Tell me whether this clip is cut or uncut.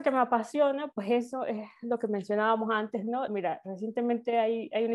cut